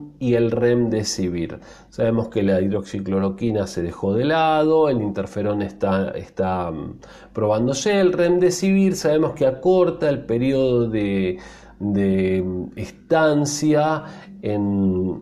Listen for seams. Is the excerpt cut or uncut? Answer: uncut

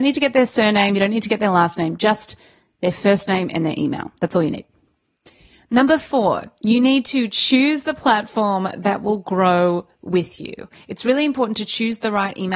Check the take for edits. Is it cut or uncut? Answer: uncut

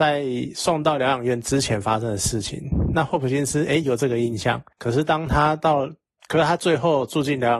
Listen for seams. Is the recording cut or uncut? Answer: uncut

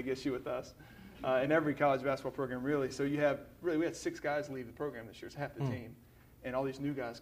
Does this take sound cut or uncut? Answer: uncut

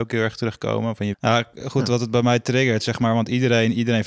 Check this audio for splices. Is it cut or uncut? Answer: cut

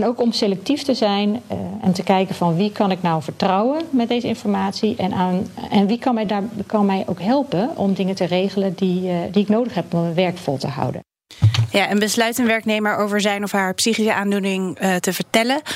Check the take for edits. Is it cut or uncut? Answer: uncut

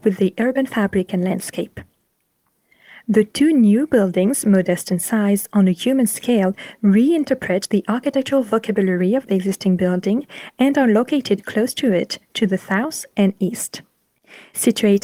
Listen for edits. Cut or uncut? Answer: uncut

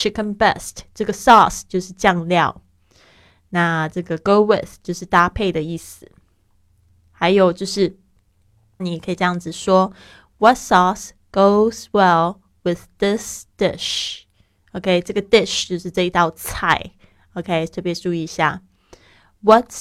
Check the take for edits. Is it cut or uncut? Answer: cut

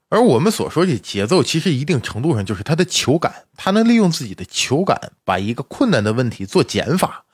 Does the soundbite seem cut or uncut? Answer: uncut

